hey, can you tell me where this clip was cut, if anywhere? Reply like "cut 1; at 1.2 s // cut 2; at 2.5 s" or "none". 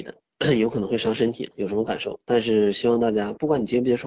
cut 1; at 1.5 s